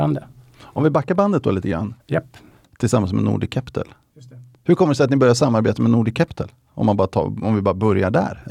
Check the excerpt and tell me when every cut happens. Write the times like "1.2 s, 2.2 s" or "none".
2.0 s

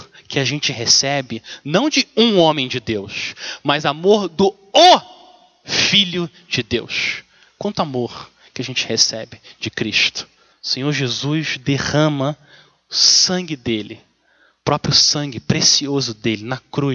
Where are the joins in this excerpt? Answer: 10.5 s

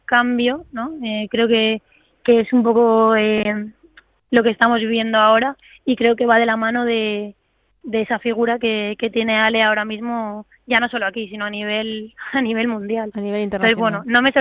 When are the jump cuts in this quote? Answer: none

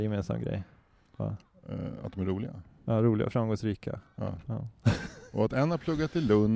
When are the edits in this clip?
none

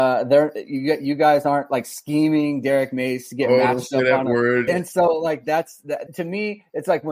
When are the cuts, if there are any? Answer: 4.7 s, 6.1 s

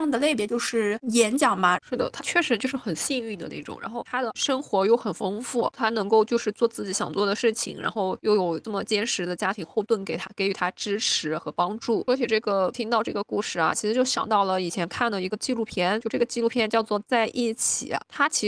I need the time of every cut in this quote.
1.8 s, 13.7 s

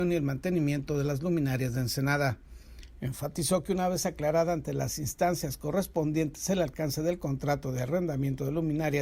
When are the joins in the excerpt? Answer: 2.9 s

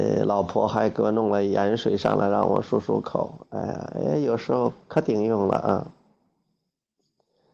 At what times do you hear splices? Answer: none

